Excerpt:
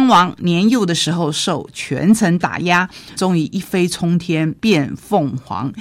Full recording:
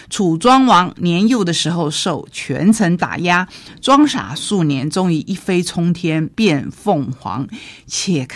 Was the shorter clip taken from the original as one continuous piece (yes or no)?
no